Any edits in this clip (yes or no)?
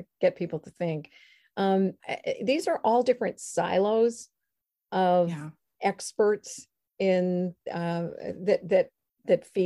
yes